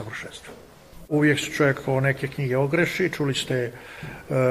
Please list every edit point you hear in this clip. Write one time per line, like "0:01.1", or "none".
0:01.1